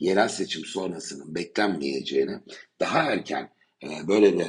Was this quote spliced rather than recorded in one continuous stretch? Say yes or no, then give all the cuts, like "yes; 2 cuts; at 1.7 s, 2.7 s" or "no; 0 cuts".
no; 0 cuts